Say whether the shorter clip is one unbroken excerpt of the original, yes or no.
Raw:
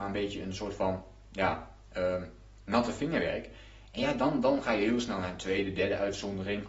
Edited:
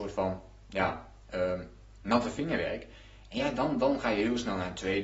yes